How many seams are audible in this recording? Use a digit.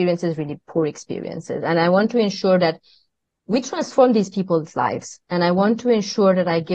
0